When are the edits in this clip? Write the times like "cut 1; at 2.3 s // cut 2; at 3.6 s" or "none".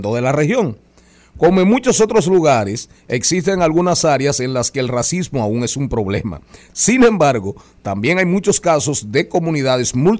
none